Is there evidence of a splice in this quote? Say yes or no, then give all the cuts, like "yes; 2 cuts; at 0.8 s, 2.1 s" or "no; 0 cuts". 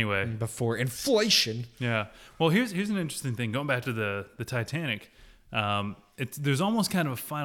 no; 0 cuts